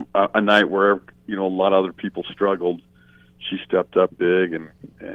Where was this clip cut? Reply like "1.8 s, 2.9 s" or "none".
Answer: 4.1 s

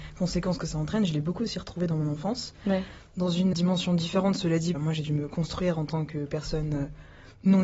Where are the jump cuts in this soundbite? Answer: 3.5 s, 4.7 s

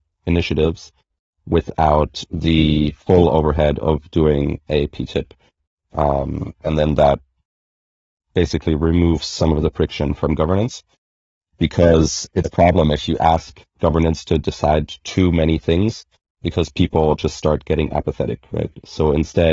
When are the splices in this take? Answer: 12.4 s

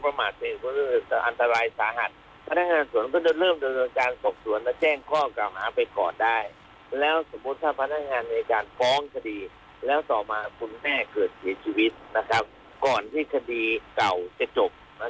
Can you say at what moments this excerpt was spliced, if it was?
13.9 s

